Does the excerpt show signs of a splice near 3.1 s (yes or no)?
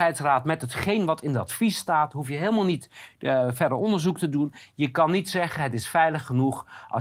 no